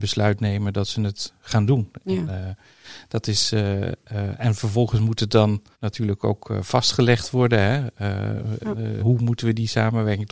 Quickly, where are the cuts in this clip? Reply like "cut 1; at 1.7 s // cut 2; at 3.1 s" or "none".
cut 1; at 5.7 s // cut 2; at 9.0 s